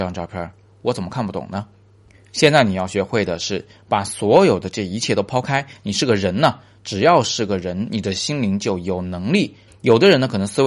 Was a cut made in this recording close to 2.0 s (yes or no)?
no